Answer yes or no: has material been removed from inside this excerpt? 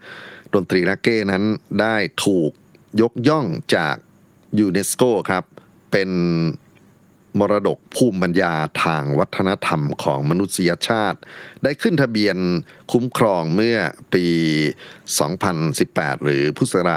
no